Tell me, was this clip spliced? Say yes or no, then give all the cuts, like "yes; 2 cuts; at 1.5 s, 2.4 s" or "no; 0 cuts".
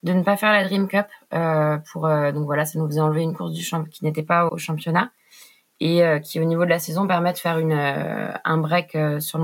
yes; 1 cut; at 4.5 s